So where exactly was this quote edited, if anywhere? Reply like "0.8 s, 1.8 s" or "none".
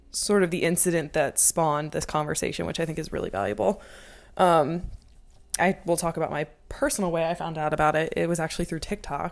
5.6 s